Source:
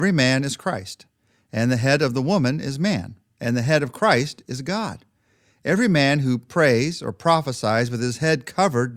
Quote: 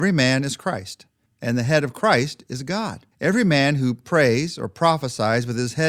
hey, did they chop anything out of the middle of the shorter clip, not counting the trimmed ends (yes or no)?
yes